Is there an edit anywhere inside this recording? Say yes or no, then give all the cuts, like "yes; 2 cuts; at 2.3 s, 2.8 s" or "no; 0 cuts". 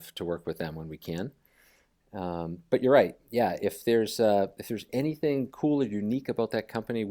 no; 0 cuts